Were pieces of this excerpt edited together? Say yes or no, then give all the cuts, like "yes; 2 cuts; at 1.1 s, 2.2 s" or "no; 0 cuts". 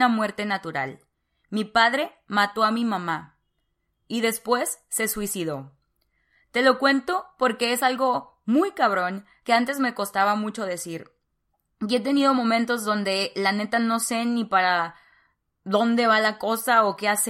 no; 0 cuts